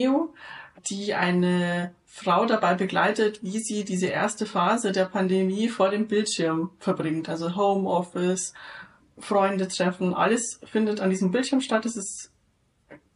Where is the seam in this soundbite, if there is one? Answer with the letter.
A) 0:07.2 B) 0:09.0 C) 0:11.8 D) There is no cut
B